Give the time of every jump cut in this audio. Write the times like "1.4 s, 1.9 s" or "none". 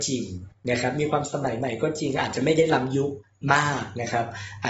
none